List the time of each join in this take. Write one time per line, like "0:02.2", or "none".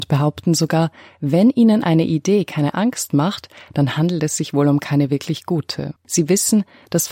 0:06.0